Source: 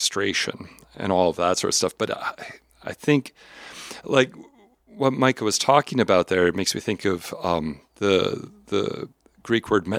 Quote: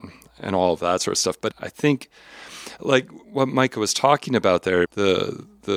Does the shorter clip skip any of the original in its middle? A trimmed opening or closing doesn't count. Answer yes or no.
yes